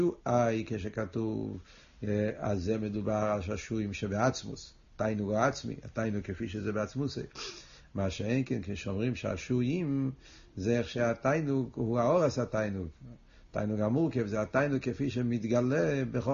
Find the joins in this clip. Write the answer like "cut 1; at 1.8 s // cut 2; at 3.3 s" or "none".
none